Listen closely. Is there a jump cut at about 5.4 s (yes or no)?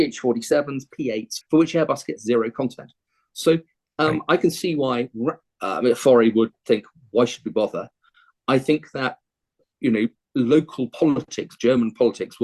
yes